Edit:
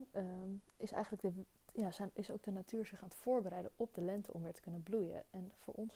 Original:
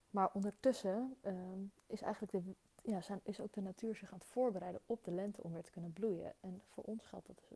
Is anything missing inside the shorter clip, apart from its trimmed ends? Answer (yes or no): no